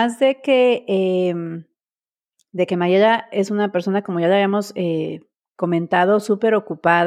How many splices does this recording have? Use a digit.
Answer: 0